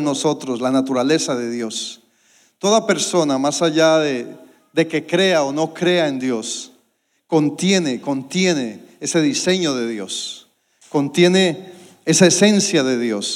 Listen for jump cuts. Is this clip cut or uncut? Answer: uncut